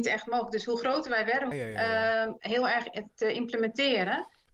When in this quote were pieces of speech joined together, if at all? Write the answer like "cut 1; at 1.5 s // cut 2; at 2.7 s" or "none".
cut 1; at 1.5 s